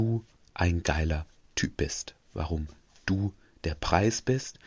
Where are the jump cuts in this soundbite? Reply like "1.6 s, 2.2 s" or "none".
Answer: none